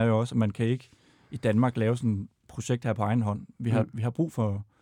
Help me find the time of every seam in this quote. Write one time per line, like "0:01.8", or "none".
none